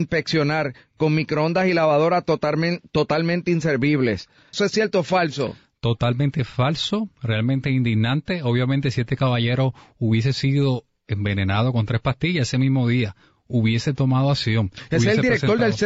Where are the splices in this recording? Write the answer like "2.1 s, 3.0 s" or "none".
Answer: 4.5 s